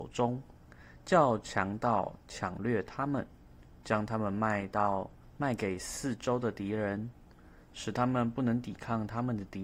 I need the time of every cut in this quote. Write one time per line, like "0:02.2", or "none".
none